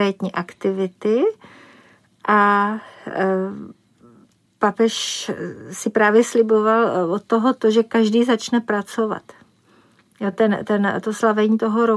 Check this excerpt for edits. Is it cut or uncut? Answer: uncut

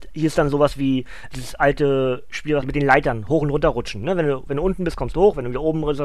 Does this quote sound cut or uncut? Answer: cut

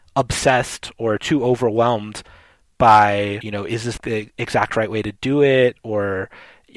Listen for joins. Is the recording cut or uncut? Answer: cut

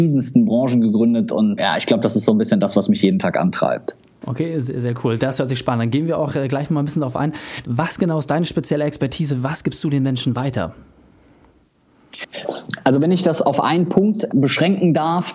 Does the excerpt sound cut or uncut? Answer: cut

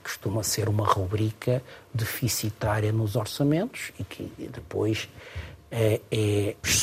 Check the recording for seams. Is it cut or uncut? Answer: uncut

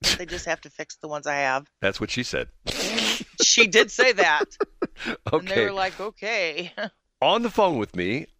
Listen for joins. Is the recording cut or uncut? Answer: uncut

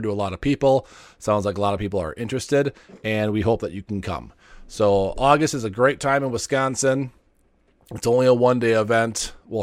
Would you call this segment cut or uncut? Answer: uncut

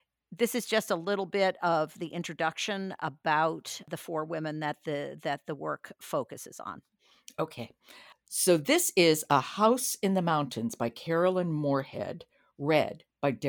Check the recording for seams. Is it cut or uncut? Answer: uncut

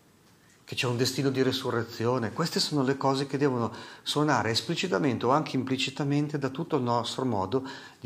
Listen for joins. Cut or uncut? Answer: uncut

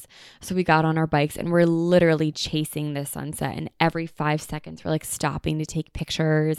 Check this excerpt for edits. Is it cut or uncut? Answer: uncut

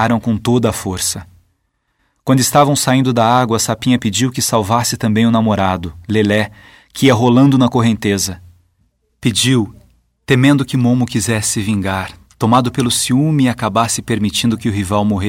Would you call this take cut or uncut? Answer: uncut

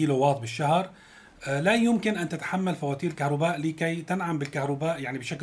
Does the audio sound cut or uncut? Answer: uncut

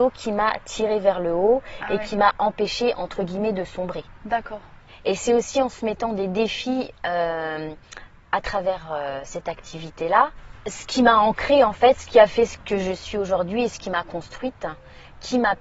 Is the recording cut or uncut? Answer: uncut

